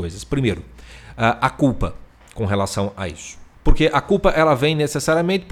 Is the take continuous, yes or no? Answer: no